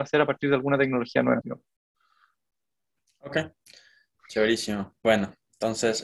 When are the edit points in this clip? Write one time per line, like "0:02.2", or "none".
0:01.4